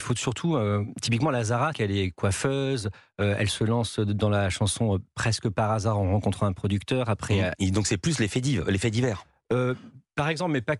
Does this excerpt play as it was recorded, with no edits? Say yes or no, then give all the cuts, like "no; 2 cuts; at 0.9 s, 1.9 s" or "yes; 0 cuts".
no; 2 cuts; at 1.7 s, 7.5 s